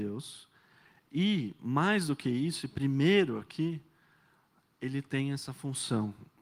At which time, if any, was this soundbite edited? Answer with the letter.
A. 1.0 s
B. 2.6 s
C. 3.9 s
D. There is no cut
D